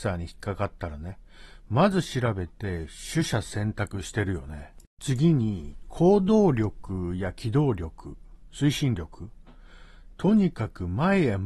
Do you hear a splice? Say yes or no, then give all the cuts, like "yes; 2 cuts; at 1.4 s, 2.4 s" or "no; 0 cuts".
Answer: yes; 1 cut; at 4.9 s